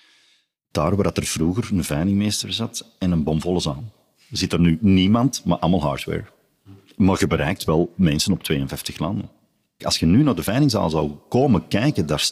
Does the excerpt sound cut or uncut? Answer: cut